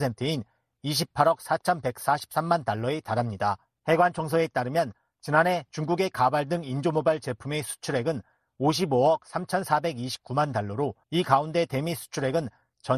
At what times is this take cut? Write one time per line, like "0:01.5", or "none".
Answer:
0:03.8
0:11.0